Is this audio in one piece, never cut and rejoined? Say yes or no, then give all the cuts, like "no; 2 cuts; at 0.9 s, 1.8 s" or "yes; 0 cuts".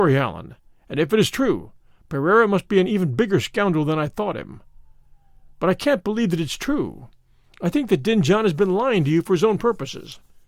yes; 0 cuts